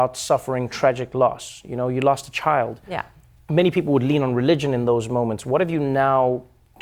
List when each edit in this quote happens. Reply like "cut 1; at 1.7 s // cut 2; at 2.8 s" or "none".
none